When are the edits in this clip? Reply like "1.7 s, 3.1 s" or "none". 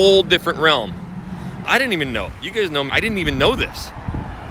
1.6 s, 2.9 s